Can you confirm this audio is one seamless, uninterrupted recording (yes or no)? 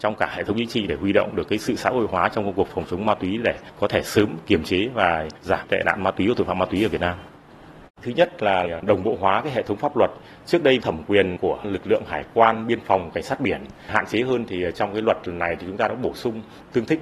no